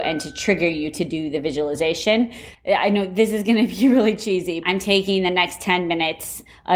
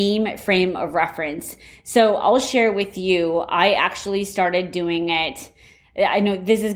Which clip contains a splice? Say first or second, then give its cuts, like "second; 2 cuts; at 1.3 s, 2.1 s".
first; 2 cuts; at 2.5 s, 4.6 s